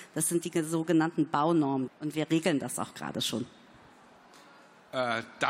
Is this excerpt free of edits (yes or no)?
no